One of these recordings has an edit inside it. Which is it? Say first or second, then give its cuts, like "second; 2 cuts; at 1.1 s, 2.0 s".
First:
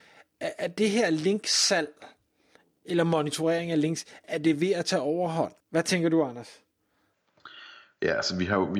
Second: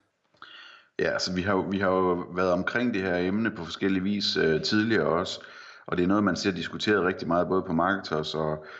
first; 2 cuts; at 4.2 s, 5.6 s